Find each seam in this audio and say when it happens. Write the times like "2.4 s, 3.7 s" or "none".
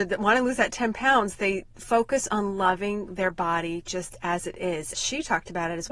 4.9 s